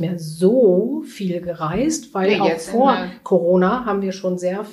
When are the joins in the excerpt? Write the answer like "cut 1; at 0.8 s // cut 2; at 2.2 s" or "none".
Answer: none